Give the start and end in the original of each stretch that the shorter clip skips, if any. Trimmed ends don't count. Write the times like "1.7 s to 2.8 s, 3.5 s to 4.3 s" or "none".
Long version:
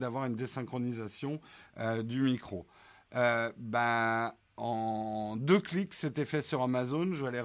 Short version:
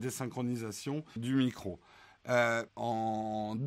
1.5 s to 2.0 s, 3.5 s to 4.5 s